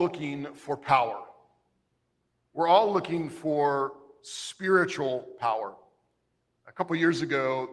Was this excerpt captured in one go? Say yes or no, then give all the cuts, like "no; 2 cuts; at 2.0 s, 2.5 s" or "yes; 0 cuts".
yes; 0 cuts